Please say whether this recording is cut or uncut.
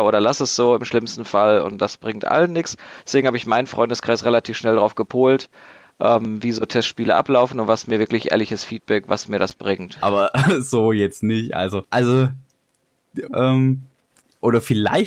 cut